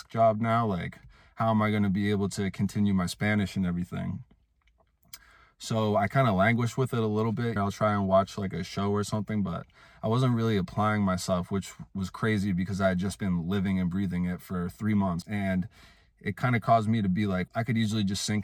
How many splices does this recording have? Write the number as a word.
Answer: three